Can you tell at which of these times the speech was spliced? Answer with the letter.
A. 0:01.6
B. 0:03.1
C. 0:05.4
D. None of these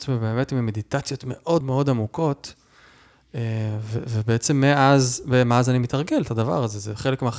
A